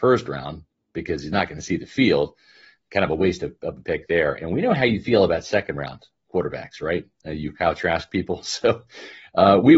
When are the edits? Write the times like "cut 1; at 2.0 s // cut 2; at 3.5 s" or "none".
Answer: none